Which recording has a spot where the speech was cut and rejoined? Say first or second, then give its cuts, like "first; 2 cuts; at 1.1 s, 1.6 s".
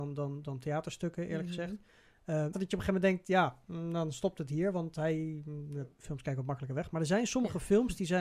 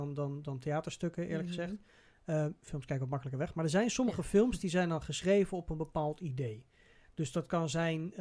first; 2 cuts; at 2.5 s, 5.9 s